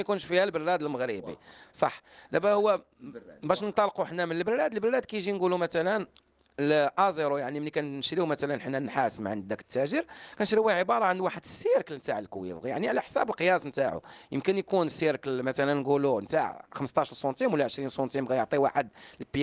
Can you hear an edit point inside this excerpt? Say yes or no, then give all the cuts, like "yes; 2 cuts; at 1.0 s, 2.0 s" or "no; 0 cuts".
no; 0 cuts